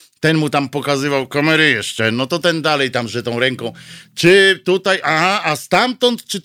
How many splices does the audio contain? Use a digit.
0